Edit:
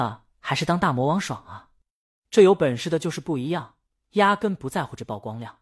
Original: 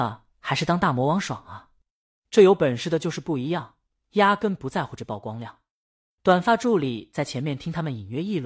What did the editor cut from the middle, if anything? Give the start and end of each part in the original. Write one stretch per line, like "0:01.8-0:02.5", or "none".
none